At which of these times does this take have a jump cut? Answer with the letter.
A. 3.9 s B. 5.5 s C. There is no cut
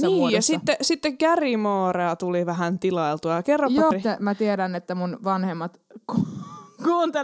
A